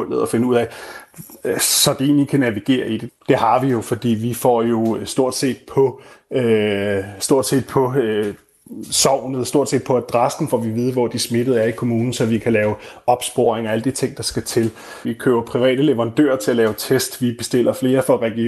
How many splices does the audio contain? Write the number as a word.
two